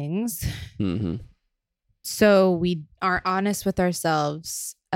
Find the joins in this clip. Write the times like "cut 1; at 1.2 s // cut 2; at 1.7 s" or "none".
none